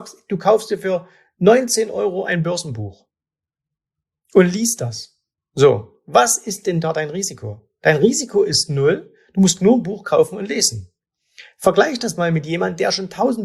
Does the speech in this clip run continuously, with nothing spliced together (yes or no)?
yes